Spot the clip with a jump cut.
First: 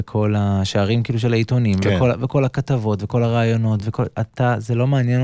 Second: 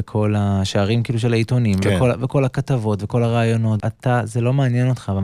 second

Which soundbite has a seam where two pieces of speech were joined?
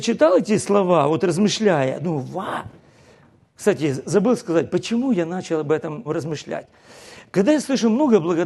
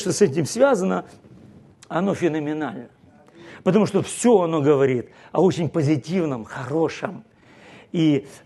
first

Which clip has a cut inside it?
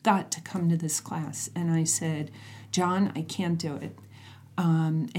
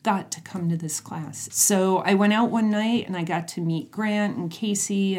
second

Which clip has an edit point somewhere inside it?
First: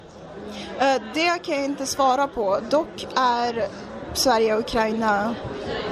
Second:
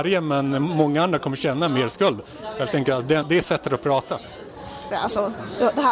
second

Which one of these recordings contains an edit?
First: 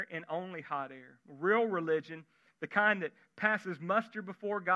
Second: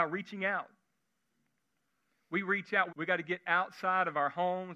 second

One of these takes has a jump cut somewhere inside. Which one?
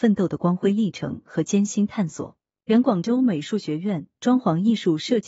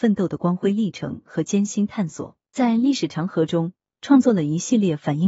second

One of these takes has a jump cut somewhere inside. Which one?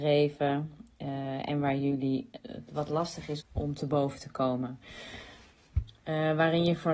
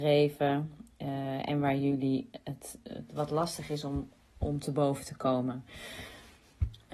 first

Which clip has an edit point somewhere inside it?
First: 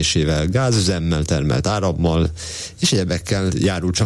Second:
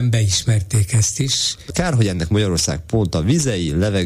second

